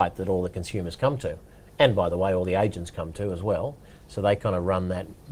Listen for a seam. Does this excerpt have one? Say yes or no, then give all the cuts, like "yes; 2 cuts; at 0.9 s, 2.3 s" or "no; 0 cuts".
no; 0 cuts